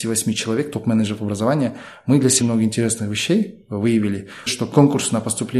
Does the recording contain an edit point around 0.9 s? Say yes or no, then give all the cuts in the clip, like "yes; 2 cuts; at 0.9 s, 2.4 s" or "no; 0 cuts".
no; 2 cuts; at 2.4 s, 4.5 s